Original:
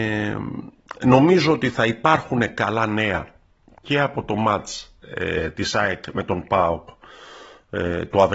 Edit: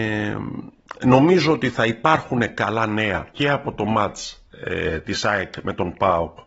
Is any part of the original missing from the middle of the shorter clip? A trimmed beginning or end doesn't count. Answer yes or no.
yes